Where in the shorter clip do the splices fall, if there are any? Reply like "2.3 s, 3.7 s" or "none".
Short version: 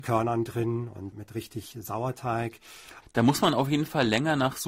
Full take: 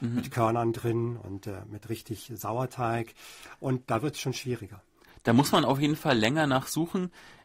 1.1 s, 3.0 s

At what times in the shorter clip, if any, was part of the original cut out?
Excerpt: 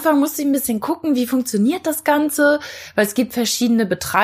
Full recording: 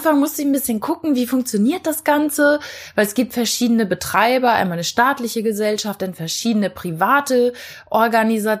none

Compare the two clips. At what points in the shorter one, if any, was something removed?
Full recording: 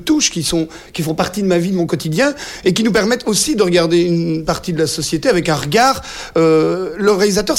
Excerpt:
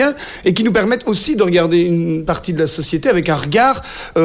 none

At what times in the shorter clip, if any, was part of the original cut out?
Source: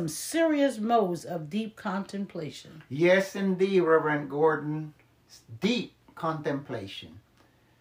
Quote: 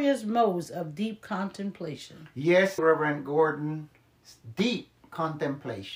2.8 s

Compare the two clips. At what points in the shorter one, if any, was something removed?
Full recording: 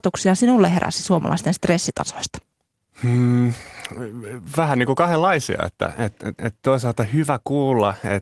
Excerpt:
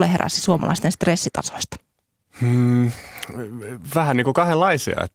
none

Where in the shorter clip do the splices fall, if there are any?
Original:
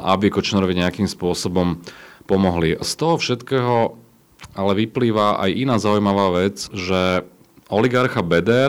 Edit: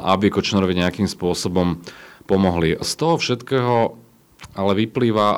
none

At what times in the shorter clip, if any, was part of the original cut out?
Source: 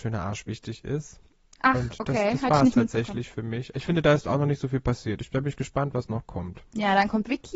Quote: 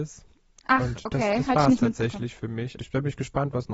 2.8 s

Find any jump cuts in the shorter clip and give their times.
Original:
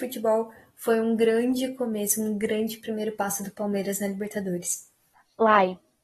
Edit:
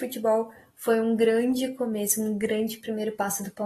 none

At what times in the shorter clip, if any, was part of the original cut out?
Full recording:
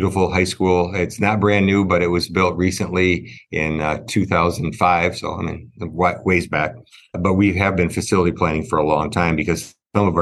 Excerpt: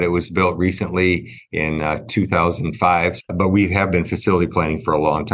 3.2 s

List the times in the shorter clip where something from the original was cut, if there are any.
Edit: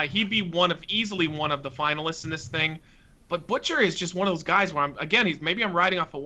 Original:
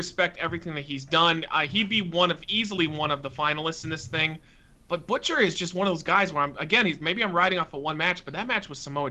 none

